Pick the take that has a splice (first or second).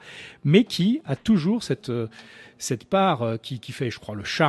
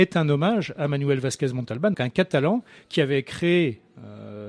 second